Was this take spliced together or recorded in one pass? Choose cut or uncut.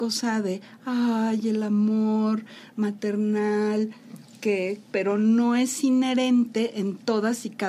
cut